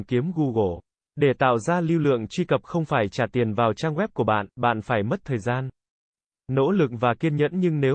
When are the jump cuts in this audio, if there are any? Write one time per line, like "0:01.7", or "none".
0:01.0